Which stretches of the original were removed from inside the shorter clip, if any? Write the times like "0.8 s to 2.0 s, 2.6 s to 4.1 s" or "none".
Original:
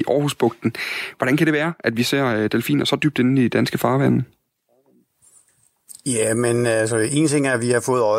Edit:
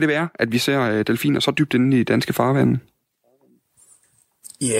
none